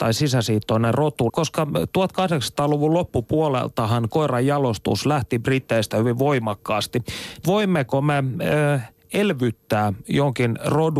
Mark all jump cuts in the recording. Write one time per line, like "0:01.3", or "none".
0:01.3
0:07.4